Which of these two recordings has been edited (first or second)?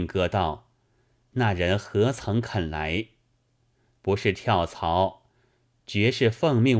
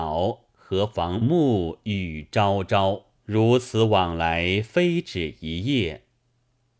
second